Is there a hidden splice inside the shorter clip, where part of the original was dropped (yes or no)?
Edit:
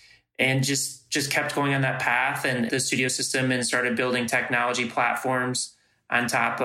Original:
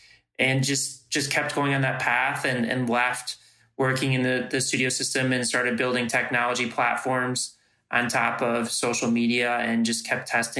yes